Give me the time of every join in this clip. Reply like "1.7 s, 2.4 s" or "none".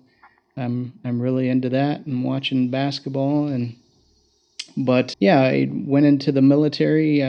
5.1 s